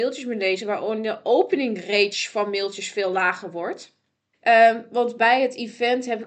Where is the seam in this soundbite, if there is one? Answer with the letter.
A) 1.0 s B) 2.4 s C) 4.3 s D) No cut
C